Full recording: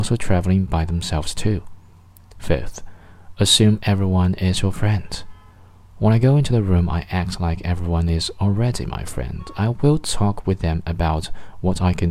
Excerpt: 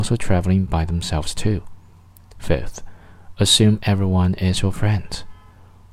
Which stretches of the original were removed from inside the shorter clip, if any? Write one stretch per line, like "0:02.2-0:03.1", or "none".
none